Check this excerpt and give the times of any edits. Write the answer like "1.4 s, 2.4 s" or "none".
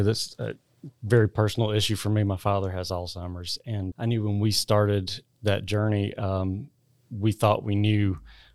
3.9 s

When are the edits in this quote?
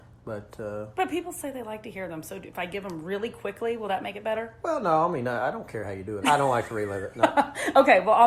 6.2 s

